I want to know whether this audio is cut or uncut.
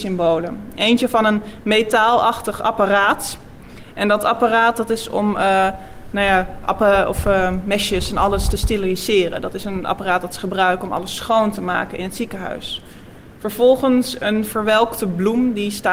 uncut